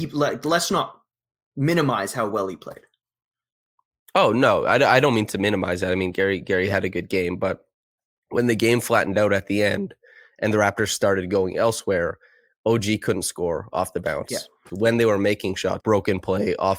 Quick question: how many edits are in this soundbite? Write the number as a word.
two